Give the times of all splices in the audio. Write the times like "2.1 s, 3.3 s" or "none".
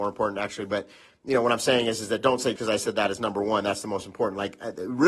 2.6 s